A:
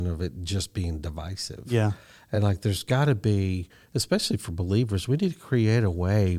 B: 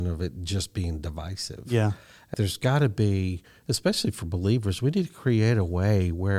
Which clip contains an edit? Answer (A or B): B